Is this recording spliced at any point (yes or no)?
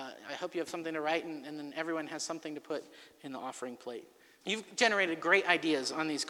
yes